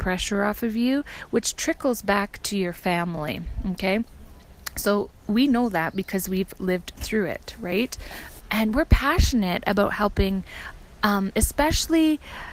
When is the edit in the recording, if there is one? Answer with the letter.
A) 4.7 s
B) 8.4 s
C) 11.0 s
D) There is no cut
B